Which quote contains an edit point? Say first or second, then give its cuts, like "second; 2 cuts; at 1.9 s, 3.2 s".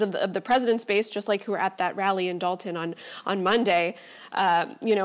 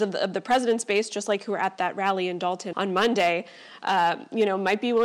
second; 1 cut; at 2.7 s